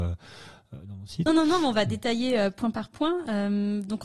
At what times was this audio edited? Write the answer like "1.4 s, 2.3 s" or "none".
1.3 s